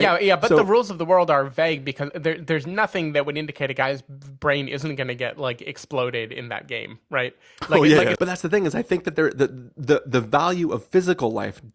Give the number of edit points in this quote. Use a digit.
1